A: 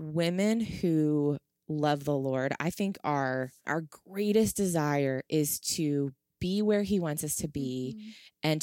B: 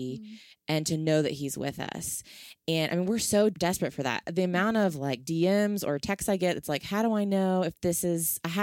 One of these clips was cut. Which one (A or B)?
A